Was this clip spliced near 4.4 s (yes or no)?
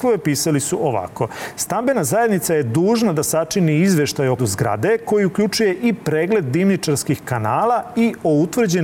yes